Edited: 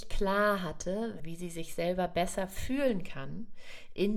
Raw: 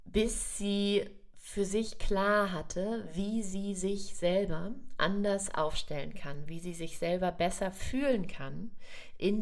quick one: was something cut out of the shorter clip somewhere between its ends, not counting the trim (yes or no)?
yes